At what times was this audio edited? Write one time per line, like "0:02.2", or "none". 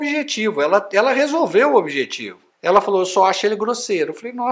0:02.5